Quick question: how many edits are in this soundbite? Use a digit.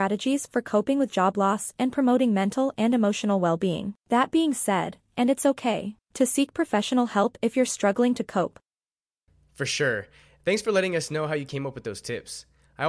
1